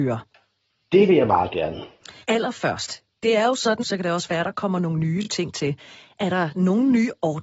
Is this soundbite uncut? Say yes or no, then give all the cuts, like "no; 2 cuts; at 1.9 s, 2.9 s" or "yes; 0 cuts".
no; 2 cuts; at 2.2 s, 3.8 s